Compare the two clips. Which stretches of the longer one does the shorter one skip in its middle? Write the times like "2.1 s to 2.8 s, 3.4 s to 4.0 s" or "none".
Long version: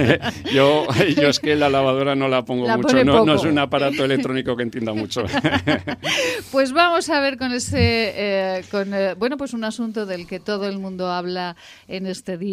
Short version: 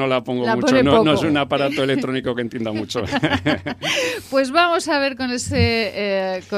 none